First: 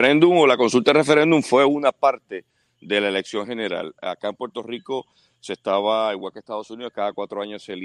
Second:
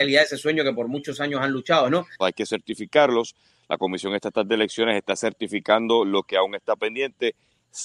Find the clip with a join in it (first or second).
second